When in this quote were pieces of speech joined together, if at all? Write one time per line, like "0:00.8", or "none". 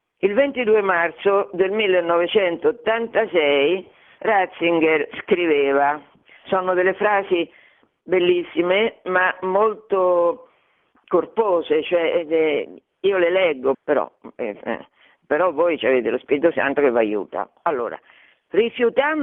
0:13.7